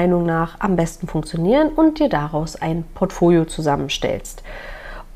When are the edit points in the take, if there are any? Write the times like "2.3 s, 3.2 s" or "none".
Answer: none